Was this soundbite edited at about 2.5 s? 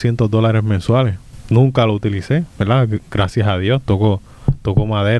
yes; 1 cut; at 2.5 s

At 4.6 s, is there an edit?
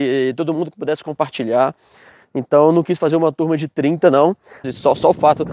yes; 1 cut; at 4.6 s

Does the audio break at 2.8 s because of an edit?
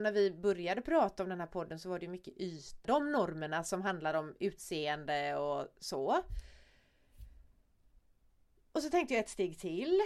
yes; 1 cut; at 2.8 s

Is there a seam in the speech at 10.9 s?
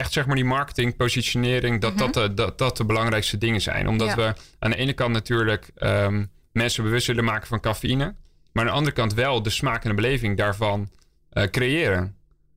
no; 0 cuts

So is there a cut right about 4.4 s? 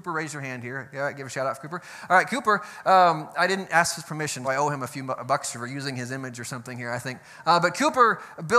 yes; 1 cut; at 4.4 s

